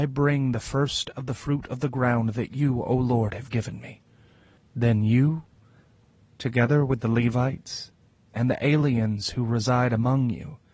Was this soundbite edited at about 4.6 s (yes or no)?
yes